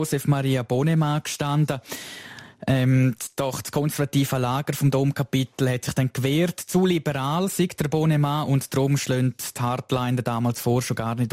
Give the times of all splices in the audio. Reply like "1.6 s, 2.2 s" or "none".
none